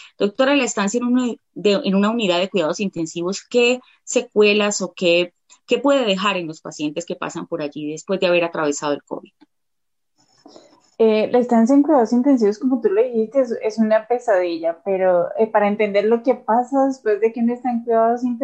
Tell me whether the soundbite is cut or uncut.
uncut